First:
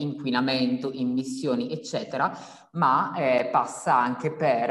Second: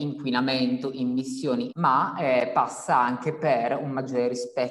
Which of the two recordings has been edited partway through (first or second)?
second